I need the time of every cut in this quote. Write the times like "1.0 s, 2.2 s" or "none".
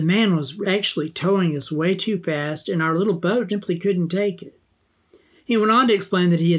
3.5 s